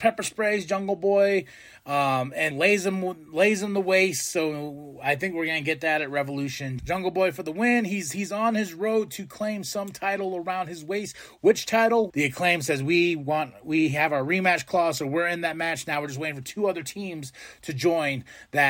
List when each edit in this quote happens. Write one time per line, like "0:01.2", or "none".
0:02.5
0:06.8
0:12.1

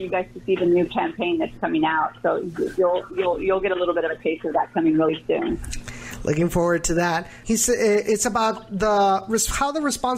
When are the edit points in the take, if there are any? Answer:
0:07.4

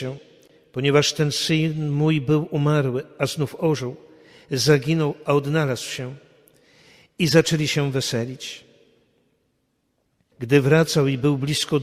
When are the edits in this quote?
0:10.3

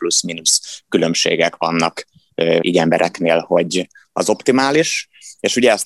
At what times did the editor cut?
0:02.6
0:04.0

